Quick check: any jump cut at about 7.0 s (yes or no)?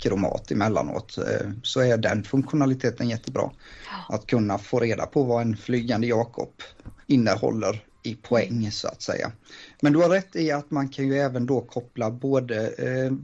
yes